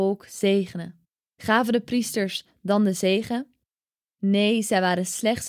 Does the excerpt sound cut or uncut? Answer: uncut